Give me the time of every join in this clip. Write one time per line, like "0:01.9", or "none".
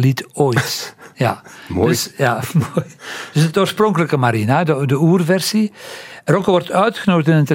none